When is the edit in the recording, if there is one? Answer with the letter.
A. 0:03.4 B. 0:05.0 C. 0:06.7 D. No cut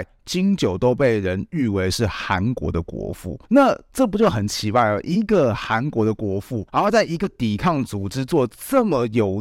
D